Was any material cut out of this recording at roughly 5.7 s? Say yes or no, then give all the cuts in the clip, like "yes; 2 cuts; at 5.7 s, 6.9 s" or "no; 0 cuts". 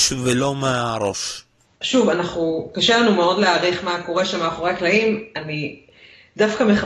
no; 1 cut; at 1.8 s